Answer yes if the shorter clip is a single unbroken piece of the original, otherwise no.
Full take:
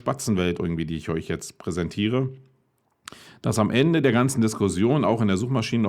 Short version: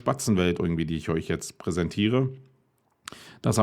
yes